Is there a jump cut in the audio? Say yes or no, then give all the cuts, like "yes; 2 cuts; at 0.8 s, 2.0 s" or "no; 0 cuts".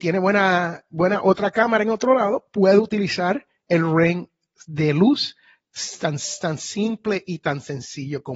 no; 0 cuts